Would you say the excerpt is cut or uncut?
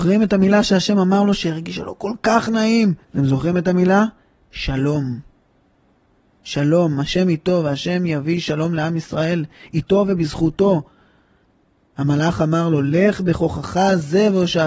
cut